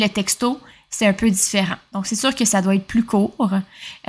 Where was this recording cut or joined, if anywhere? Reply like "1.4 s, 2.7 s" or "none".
none